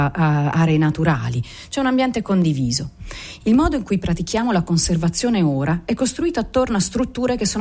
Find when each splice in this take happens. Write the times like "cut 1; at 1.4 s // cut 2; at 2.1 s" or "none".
cut 1; at 3.4 s